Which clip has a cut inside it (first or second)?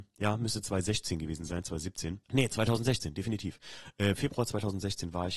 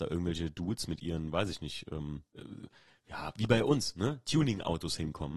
first